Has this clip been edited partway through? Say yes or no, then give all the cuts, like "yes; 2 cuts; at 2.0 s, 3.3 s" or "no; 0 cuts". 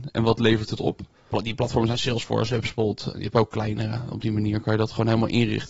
yes; 1 cut; at 3.1 s